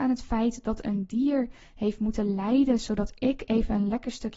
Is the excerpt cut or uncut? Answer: uncut